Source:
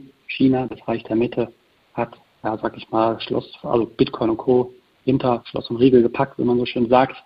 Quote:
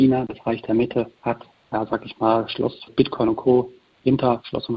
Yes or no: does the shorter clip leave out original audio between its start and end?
yes